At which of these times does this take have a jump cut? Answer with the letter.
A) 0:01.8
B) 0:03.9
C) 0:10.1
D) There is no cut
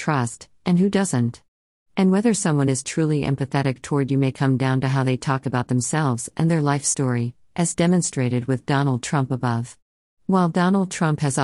C